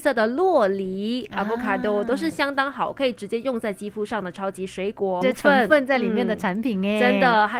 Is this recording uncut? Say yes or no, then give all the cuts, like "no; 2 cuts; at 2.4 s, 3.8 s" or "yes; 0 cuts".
no; 1 cut; at 5.2 s